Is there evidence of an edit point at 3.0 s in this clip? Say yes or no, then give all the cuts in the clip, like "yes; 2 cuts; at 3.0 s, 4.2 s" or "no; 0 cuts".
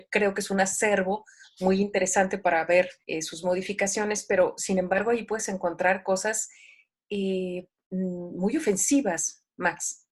yes; 1 cut; at 3.0 s